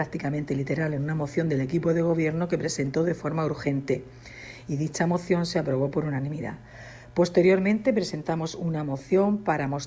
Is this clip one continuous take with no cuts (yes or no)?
yes